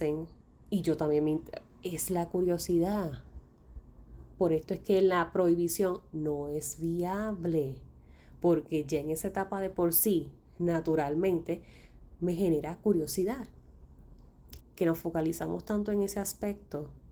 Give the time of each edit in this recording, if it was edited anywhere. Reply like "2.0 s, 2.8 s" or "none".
14.6 s